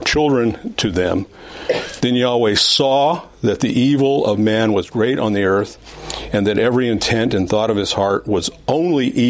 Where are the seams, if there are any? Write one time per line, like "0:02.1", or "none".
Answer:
0:02.0